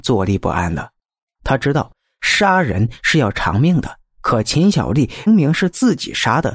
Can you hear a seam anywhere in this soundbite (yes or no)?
yes